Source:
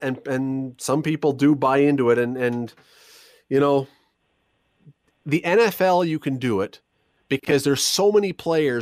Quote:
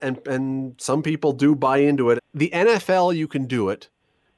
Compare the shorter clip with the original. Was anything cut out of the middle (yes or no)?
yes